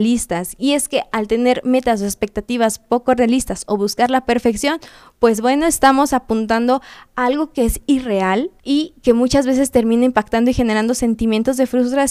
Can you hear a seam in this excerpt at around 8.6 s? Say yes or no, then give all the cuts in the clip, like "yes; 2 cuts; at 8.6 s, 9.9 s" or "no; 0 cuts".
yes; 1 cut; at 8.6 s